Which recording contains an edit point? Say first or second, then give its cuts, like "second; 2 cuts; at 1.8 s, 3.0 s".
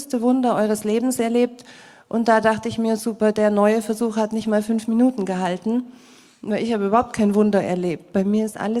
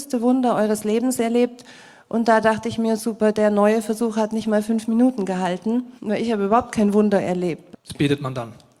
second; 2 cuts; at 6.0 s, 7.7 s